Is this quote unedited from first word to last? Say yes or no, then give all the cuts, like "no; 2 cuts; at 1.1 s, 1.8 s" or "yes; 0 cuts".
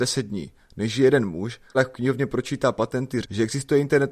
no; 2 cuts; at 1.7 s, 3.2 s